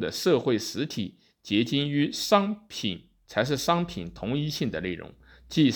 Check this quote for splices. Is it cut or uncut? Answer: cut